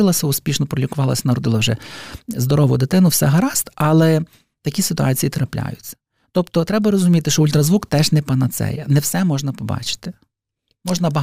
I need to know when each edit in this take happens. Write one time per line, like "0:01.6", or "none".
none

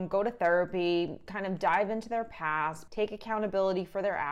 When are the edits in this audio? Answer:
0:02.9

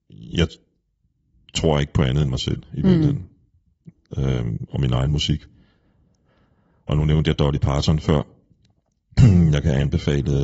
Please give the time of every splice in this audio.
none

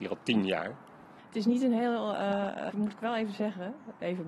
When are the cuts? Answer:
0:01.2
0:02.7

